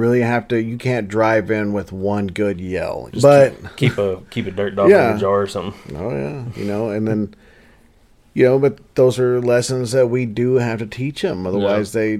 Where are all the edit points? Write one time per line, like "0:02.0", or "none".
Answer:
0:03.1